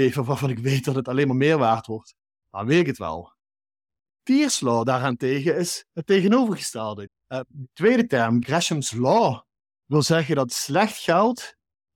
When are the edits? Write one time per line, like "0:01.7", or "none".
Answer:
0:02.4
0:07.1
0:08.4